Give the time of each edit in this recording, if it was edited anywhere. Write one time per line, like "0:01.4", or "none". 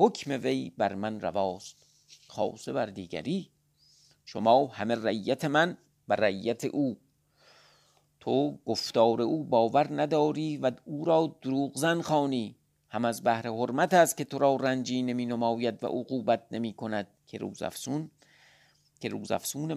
0:17.1